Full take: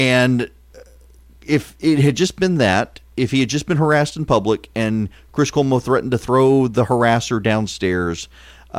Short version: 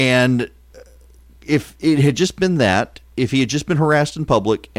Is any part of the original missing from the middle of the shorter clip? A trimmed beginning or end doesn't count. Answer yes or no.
no